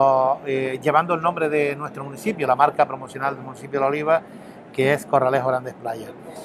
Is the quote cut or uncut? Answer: uncut